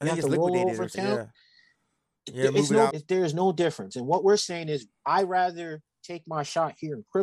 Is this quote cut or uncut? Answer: cut